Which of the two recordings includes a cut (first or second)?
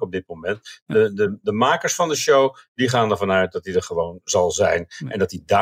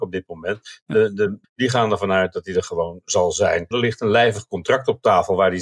second